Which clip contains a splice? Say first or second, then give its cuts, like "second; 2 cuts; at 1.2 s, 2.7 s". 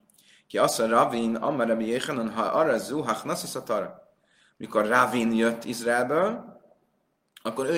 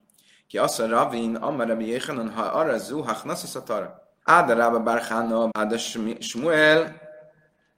second; 2 cuts; at 4.2 s, 5.5 s